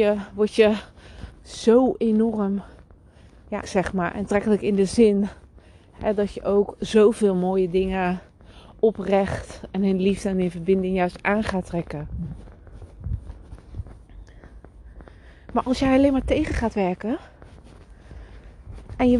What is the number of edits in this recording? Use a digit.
1